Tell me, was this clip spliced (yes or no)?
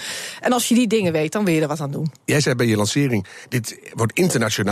yes